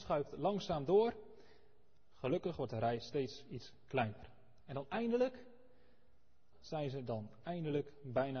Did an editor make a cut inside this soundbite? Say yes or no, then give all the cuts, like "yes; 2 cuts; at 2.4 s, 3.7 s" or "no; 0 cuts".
yes; 1 cut; at 6.5 s